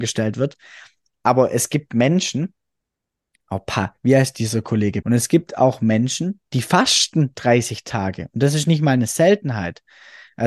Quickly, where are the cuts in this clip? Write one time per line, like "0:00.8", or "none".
0:05.0